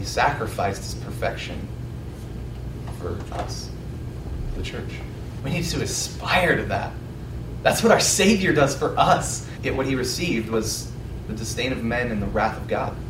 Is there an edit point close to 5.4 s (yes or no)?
yes